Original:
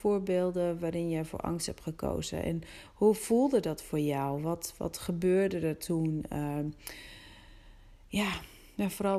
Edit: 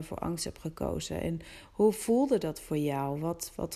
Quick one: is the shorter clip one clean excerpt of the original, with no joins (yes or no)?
yes